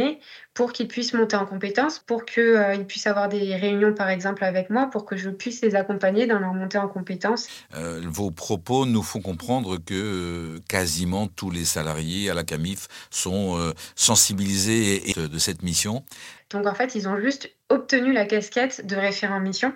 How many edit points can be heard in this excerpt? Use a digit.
3